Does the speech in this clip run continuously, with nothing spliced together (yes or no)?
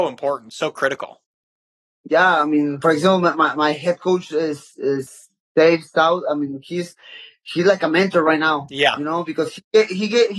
yes